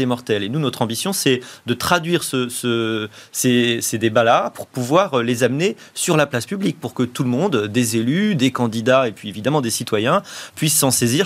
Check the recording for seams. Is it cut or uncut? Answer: uncut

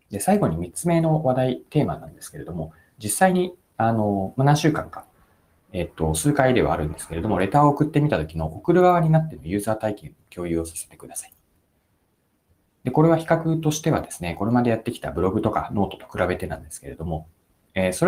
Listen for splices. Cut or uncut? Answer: uncut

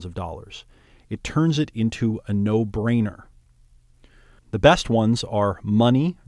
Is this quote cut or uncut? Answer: cut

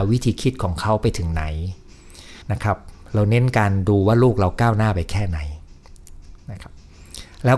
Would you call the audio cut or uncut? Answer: cut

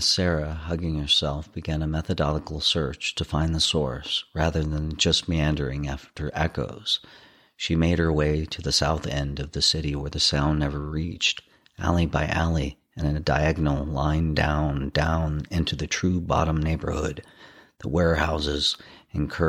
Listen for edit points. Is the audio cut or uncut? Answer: uncut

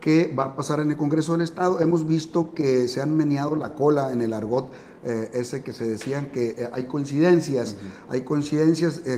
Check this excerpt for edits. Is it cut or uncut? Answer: uncut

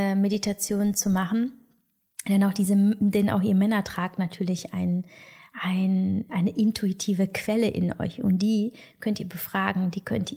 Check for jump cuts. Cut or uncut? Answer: cut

